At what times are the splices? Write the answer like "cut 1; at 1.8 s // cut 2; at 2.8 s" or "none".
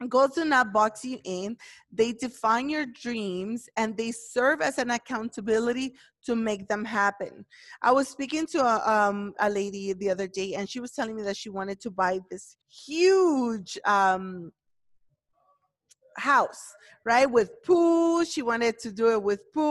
cut 1; at 9.3 s // cut 2; at 12.6 s